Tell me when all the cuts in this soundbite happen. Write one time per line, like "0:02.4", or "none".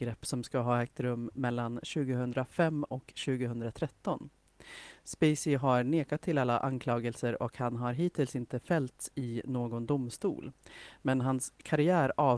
none